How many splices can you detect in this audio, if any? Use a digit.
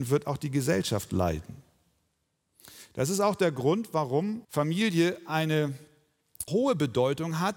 2